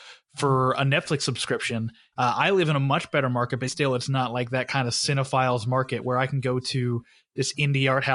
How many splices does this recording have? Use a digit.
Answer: 2